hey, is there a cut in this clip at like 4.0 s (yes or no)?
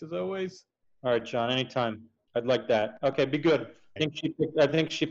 yes